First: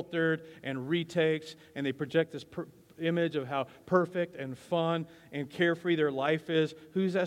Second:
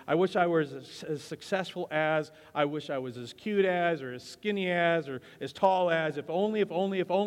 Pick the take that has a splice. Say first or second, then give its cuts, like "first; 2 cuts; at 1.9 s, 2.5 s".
second; 1 cut; at 5.0 s